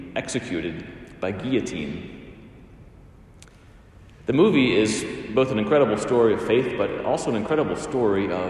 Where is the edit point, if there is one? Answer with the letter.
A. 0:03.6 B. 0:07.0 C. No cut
C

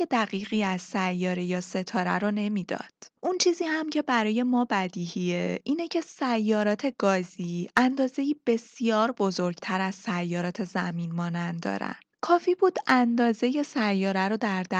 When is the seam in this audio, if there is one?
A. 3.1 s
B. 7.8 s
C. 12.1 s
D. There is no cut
C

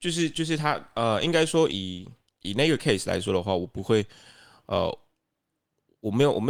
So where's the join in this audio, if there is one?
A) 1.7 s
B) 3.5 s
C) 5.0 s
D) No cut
A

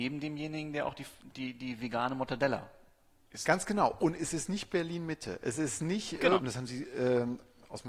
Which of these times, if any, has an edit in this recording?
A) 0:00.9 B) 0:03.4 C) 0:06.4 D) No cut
C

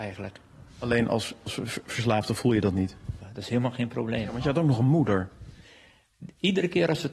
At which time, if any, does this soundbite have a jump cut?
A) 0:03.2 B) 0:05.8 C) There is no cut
A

